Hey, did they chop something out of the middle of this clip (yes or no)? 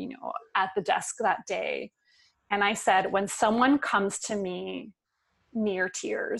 no